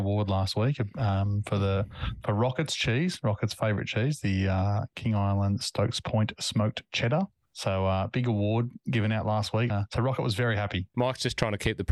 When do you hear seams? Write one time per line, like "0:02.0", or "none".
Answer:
0:09.7
0:10.9